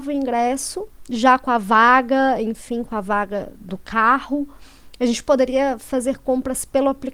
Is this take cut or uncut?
cut